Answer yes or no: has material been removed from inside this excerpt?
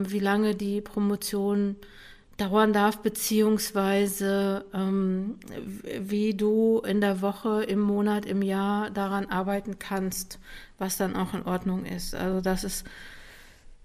no